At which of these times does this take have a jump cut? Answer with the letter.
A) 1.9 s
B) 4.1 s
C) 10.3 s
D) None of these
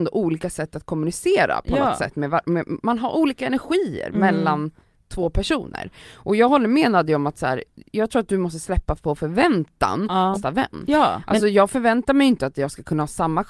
C